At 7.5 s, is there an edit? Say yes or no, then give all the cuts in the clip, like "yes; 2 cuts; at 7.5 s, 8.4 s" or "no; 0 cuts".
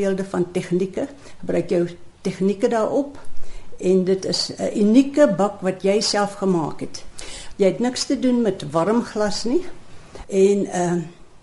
yes; 2 cuts; at 7.5 s, 10.2 s